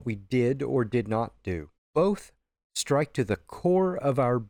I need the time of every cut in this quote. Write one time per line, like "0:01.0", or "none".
0:01.8